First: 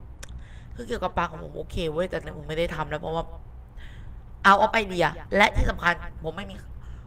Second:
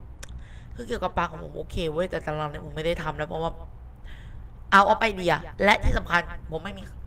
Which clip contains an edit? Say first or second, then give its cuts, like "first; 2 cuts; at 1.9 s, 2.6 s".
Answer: first; 1 cut; at 2.2 s